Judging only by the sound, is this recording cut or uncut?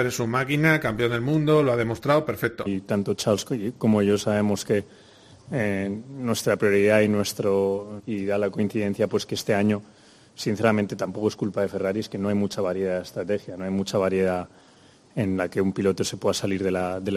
cut